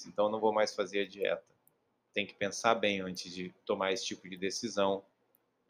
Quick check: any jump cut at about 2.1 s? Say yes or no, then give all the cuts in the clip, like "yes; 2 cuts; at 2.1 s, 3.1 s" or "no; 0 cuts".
yes; 1 cut; at 2.1 s